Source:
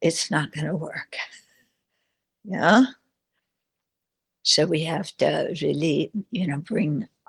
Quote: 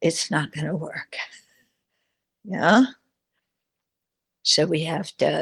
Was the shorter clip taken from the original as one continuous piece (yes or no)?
yes